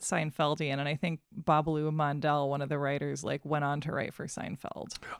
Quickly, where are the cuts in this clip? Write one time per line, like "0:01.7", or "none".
0:01.3